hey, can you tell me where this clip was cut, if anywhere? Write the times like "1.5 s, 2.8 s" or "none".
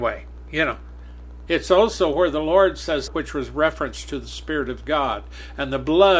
1.5 s, 3.1 s